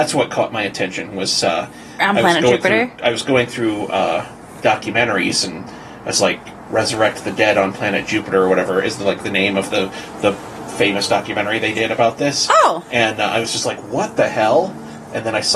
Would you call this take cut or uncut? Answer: uncut